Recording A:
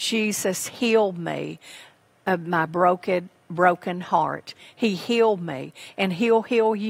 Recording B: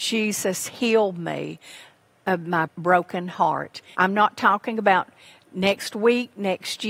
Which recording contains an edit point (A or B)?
B